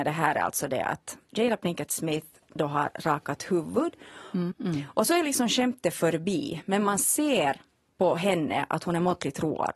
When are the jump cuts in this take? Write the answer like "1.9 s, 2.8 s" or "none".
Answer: 4.5 s